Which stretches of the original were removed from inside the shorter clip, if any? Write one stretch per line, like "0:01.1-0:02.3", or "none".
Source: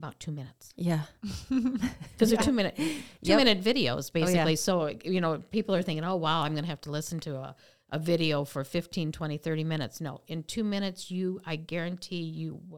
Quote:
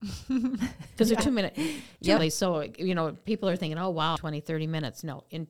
0:03.4-0:04.4
0:06.4-0:09.1